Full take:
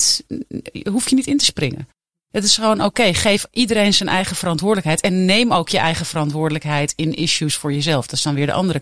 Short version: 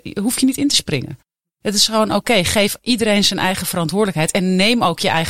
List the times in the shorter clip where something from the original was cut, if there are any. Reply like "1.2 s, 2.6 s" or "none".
none